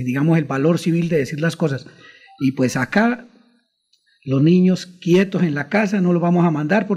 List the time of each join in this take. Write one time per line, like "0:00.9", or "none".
none